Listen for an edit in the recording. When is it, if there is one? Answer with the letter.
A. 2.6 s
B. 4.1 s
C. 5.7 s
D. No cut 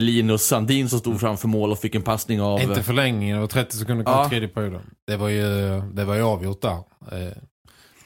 B